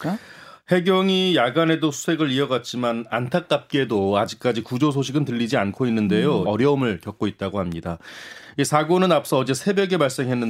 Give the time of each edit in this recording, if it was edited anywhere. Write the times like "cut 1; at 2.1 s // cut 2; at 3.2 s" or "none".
cut 1; at 6.4 s

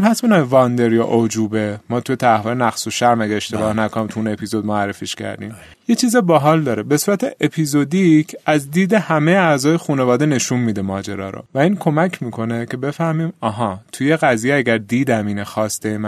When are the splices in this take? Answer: cut 1; at 5.7 s // cut 2; at 11.5 s

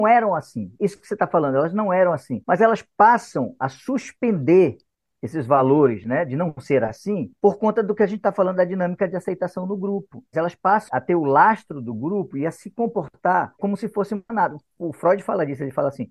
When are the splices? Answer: cut 1; at 10.3 s

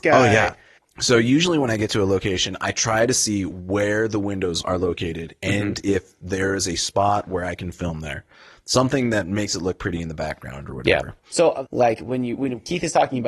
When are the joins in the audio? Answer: cut 1; at 11.7 s

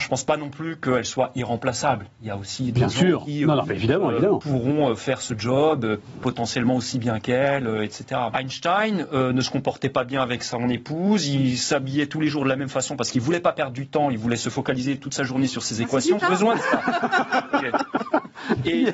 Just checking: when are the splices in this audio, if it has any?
cut 1; at 8.3 s // cut 2; at 16.2 s

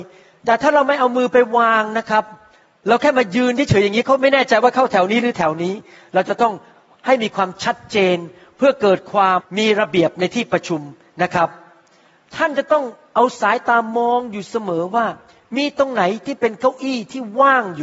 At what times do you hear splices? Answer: cut 1; at 9.4 s

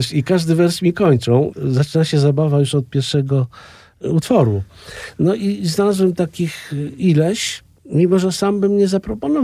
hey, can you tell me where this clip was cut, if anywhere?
none

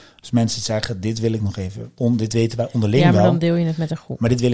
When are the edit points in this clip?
cut 1; at 2.0 s

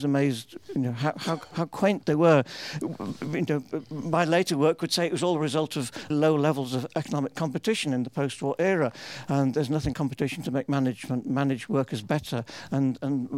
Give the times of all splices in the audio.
cut 1; at 6.1 s // cut 2; at 9.9 s

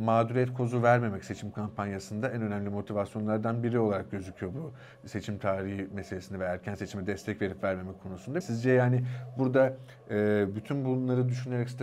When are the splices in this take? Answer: cut 1; at 8.4 s

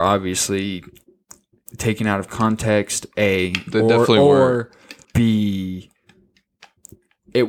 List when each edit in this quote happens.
cut 1; at 5.0 s

